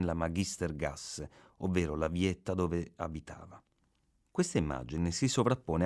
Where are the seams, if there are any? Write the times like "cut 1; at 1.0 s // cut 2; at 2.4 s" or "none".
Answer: none